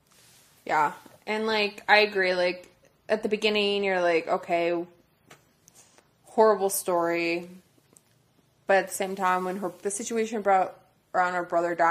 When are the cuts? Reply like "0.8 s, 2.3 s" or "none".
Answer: 9.8 s